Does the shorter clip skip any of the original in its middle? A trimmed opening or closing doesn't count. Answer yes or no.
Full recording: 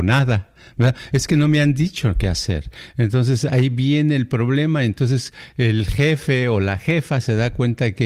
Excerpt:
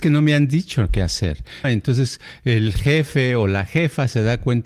yes